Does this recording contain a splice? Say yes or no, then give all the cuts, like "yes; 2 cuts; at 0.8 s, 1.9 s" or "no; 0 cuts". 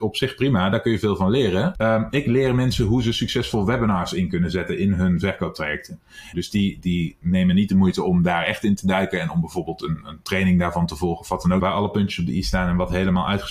yes; 3 cuts; at 1.7 s, 6.3 s, 11.6 s